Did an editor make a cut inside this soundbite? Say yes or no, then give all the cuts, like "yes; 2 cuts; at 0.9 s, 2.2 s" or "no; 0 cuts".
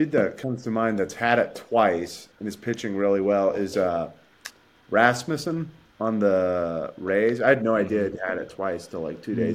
no; 0 cuts